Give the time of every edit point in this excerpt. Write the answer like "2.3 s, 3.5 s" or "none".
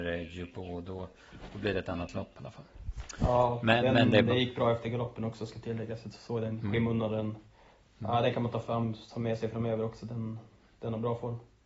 none